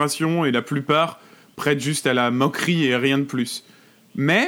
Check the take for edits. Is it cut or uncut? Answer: uncut